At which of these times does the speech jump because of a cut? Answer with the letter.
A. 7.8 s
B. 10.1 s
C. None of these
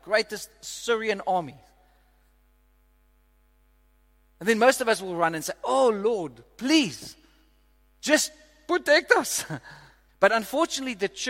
B